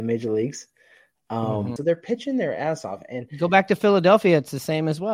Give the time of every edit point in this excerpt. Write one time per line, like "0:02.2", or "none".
0:01.8